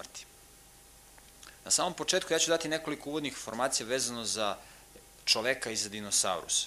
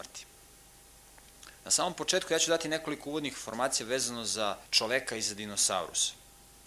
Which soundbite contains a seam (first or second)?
second